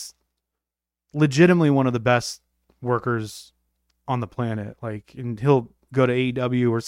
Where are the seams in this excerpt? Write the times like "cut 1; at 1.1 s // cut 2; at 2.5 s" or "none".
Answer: none

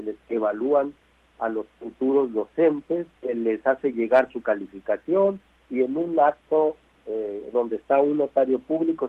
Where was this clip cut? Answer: cut 1; at 3.2 s

